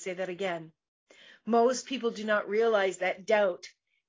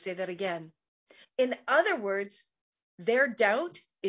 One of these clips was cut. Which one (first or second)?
second